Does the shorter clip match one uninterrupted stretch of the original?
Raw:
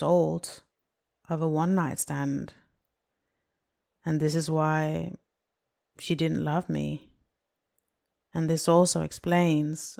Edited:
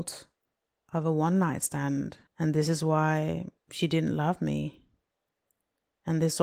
no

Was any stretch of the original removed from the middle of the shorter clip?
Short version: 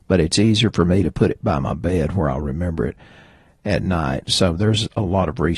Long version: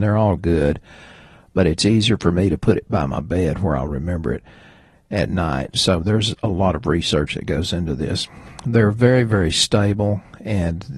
no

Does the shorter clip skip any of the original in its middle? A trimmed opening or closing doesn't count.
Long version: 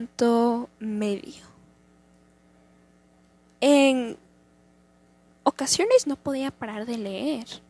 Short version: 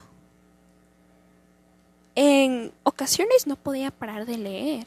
yes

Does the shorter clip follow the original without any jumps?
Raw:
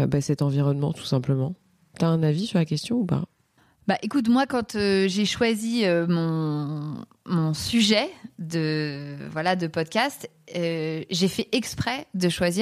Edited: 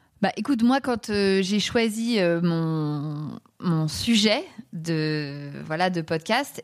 yes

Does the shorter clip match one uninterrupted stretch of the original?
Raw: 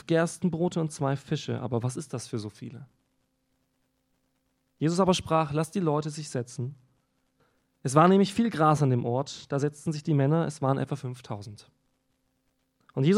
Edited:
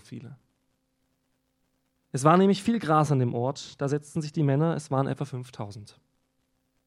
no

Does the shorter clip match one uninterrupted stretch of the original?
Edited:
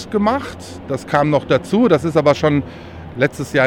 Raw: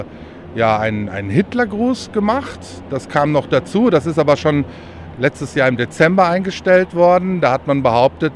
yes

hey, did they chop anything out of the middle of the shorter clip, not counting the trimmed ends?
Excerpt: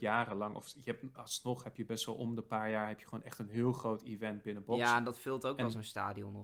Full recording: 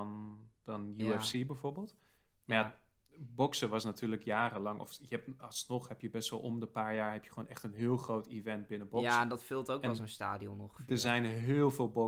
no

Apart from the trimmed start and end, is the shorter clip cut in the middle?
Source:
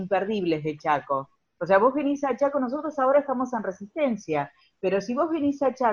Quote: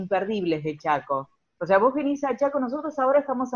no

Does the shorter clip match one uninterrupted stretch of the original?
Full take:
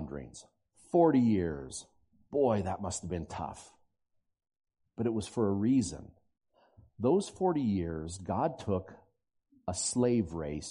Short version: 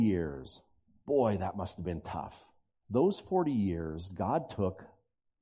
no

